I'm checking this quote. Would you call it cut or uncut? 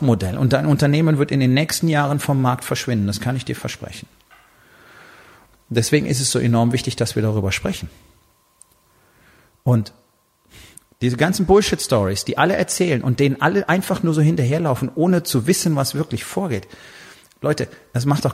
uncut